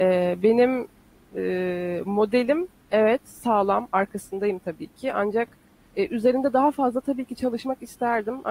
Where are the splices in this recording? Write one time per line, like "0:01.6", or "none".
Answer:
none